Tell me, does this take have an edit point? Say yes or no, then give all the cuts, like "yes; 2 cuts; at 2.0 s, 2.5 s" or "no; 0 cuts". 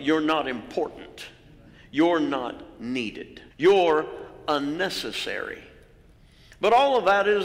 yes; 1 cut; at 3.5 s